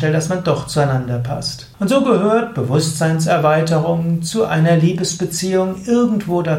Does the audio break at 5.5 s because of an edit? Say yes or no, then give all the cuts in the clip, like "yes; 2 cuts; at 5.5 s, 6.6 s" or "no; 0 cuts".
no; 1 cut; at 1.7 s